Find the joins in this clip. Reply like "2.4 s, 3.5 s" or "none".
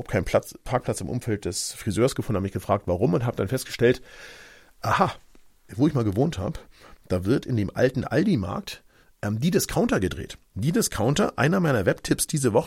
5.7 s